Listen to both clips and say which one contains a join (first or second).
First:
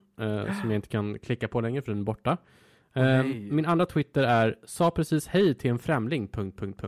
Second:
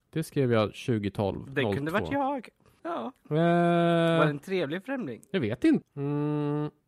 second